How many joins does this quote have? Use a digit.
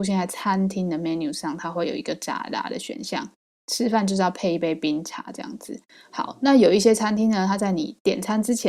0